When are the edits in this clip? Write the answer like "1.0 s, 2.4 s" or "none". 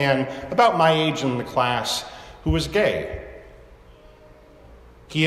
none